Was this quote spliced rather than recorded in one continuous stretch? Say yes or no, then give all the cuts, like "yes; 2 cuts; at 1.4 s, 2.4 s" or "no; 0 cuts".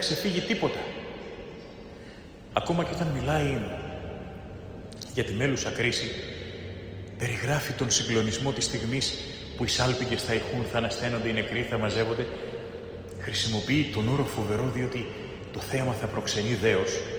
yes; 1 cut; at 2.5 s